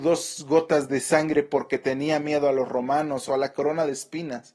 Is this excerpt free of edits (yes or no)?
no